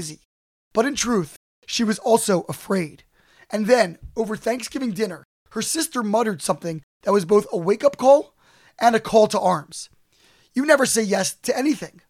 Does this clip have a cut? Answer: no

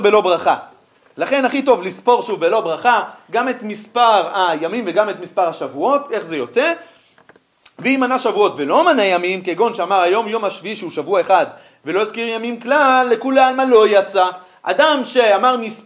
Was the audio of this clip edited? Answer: no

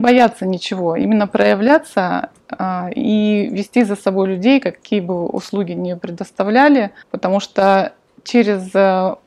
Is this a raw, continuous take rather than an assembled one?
no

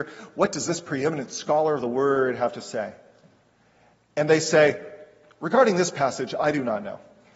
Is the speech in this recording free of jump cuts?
yes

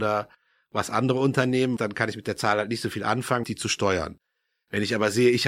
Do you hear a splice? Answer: yes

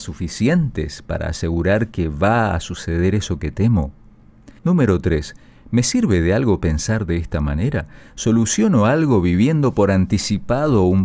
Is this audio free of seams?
no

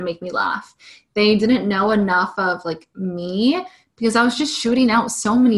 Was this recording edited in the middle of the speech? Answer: no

